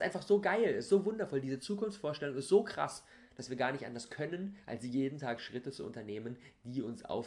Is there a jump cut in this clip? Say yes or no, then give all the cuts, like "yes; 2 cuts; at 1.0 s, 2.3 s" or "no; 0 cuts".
no; 0 cuts